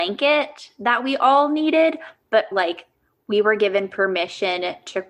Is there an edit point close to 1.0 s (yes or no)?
no